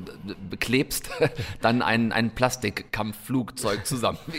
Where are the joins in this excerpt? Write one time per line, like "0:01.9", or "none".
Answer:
none